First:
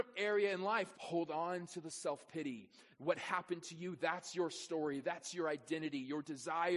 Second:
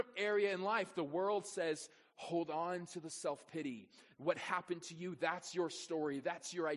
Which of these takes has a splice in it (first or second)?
first